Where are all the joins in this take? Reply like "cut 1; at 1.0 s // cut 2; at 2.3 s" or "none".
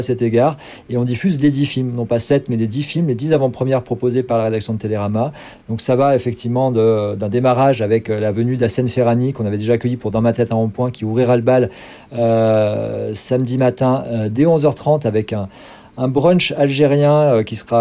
none